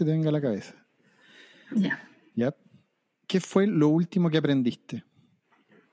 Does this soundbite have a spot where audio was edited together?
no; 0 cuts

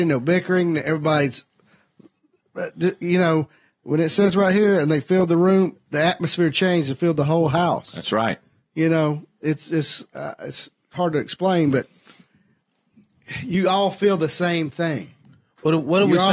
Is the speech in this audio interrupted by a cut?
no; 0 cuts

